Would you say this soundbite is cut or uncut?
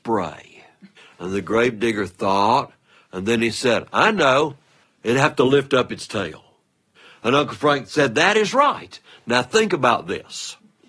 uncut